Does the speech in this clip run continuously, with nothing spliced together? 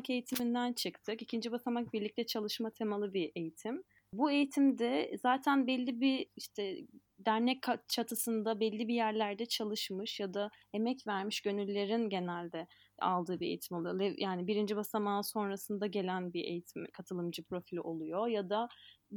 yes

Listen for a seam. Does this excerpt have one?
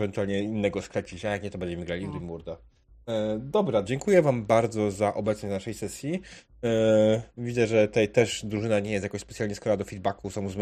yes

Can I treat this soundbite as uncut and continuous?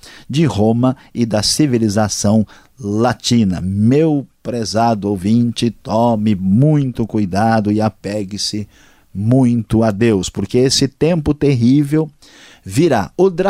yes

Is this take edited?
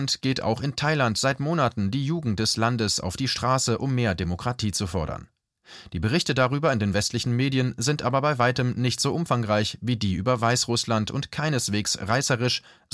no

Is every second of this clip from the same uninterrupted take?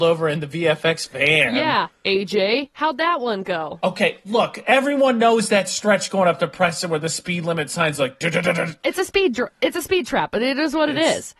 yes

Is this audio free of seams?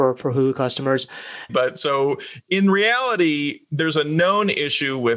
no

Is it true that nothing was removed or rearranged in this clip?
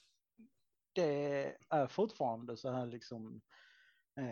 no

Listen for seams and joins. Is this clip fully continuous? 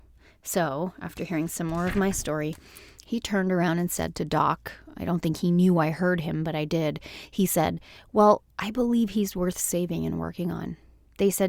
yes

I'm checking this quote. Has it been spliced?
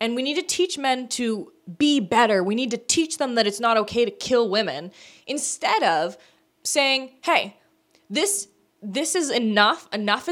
no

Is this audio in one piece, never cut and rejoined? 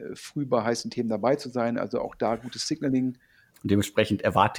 no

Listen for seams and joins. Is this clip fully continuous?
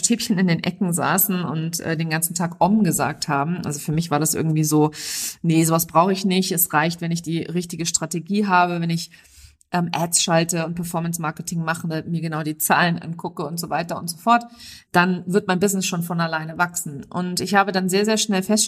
yes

